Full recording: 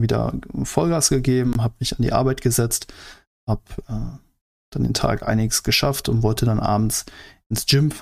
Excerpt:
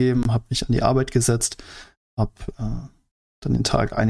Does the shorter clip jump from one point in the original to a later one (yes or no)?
no